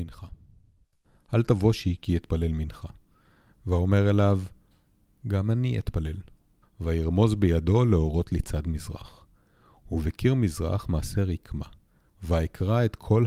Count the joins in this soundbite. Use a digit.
1